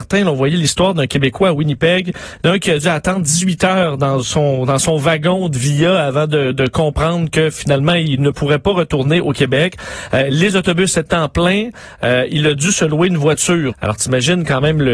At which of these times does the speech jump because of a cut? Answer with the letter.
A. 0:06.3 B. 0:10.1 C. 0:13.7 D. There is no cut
C